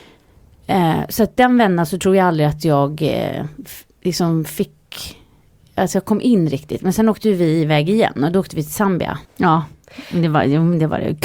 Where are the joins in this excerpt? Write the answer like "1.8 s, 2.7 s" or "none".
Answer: 1.4 s, 9.2 s